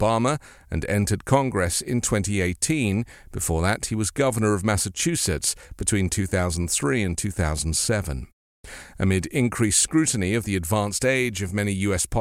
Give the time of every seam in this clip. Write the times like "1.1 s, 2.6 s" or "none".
none